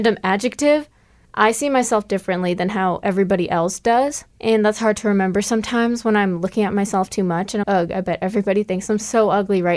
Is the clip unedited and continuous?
no; 3 cuts; at 1.3 s, 4.3 s, 7.6 s

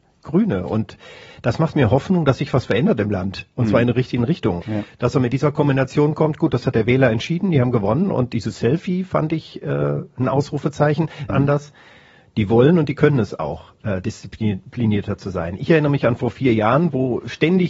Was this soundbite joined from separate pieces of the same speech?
yes; 2 cuts; at 4.6 s, 11.3 s

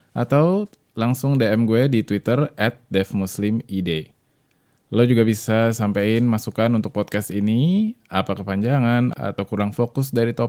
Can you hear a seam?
yes; 1 cut; at 9.1 s

